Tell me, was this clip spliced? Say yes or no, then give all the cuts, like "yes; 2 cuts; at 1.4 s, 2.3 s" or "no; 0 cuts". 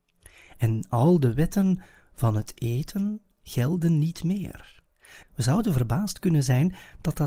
yes; 2 cuts; at 3.3 s, 5.2 s